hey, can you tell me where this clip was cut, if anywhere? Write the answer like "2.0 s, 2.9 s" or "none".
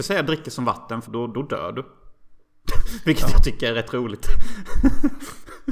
1.0 s